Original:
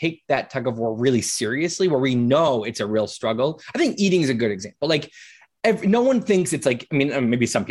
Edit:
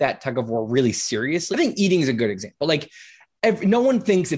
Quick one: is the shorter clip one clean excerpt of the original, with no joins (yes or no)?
no